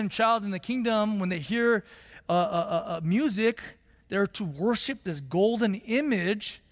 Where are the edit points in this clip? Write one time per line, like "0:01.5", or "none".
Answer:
none